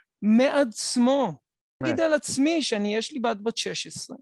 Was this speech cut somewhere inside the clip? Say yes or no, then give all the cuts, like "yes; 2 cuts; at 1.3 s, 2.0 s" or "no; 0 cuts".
yes; 1 cut; at 1.8 s